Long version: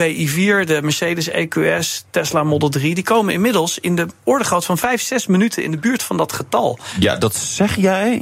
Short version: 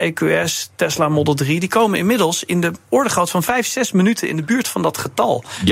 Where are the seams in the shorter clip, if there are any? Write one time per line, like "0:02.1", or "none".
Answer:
none